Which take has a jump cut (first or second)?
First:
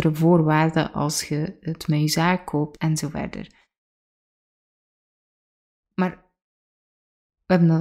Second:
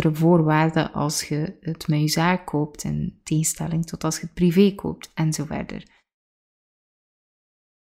first